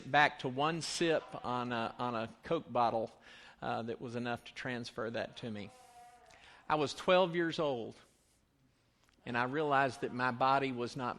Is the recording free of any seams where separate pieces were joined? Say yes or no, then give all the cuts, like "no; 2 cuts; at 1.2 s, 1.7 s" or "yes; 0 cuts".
yes; 0 cuts